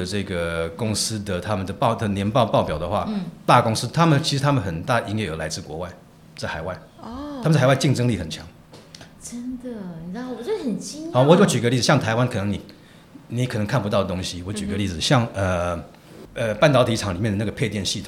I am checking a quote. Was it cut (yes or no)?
no